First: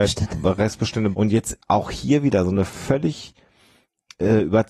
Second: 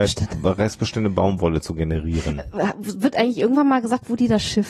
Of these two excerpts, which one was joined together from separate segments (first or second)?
first